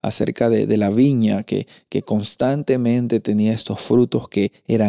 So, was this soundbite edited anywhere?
no; 0 cuts

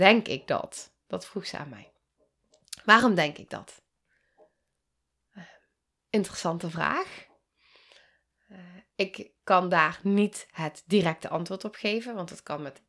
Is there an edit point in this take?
no; 0 cuts

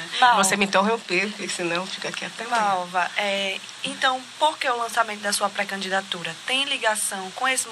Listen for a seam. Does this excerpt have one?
no; 0 cuts

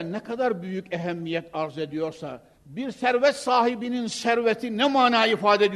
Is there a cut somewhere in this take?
yes; 1 cut; at 2.5 s

